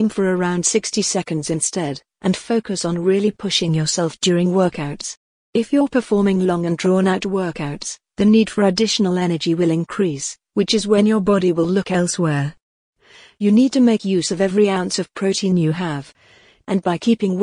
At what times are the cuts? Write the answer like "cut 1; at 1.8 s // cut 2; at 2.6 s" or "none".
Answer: none